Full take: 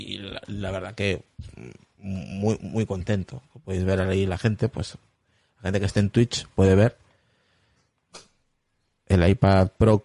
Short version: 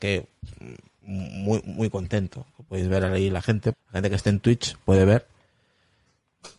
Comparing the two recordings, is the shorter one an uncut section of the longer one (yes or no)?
no